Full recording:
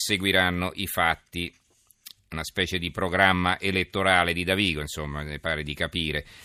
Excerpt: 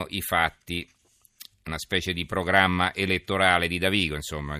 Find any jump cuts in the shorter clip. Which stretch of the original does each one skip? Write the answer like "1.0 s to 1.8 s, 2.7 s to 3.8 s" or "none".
none